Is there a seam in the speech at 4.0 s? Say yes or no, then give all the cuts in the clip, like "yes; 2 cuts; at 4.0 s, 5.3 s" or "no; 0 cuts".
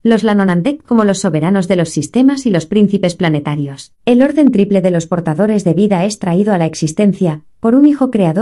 yes; 1 cut; at 4.0 s